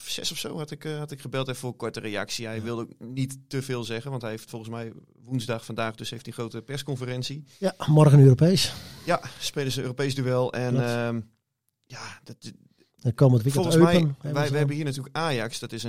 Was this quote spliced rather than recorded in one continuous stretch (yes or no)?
no